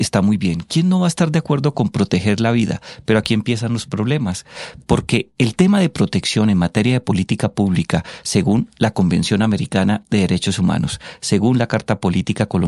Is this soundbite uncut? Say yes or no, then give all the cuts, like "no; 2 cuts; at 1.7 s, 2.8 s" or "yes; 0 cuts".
yes; 0 cuts